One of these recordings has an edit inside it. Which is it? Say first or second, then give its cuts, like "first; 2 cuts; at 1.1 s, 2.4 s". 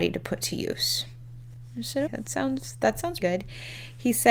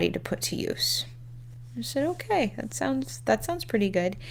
first; 2 cuts; at 2.1 s, 3.2 s